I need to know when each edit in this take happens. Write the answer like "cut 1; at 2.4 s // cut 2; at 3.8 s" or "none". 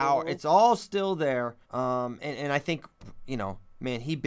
cut 1; at 1.6 s